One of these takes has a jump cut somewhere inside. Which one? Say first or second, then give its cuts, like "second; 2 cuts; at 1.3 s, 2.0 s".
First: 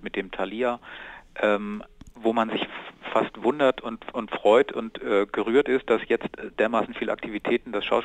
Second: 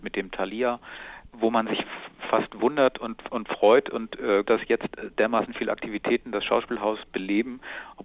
second; 2 cuts; at 1.2 s, 4.4 s